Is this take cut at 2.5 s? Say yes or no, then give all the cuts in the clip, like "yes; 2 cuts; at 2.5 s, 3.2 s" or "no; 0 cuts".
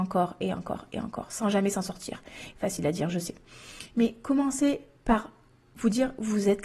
yes; 1 cut; at 2.5 s